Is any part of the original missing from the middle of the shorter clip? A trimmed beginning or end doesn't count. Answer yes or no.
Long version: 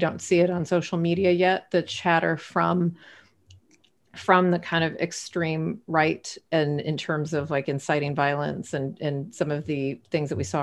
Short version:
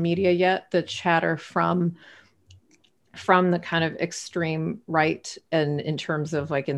no